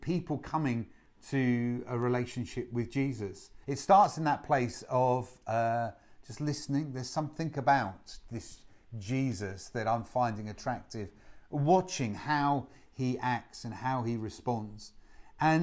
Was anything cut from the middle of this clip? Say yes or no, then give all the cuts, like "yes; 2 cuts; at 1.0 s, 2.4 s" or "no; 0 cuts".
yes; 1 cut; at 3.6 s